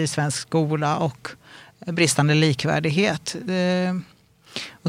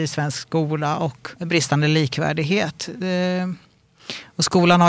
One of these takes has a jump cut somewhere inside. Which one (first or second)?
second